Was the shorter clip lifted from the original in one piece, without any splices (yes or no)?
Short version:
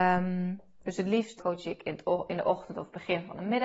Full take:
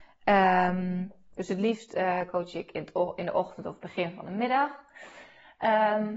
no